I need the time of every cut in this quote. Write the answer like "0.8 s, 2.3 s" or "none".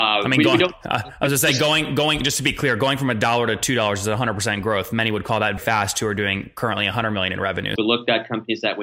5.6 s, 7.8 s